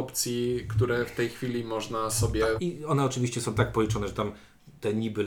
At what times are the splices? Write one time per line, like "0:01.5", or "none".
0:02.6